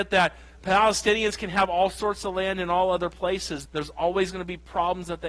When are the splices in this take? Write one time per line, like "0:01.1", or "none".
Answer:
0:03.7